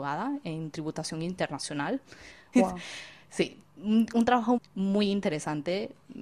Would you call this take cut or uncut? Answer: cut